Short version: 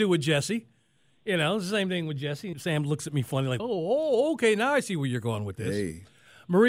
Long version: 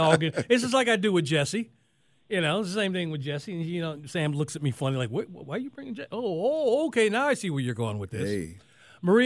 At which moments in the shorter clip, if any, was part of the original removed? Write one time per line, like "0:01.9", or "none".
0:02.5
0:03.6